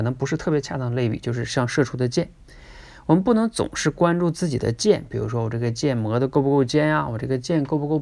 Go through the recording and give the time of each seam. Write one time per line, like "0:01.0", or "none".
none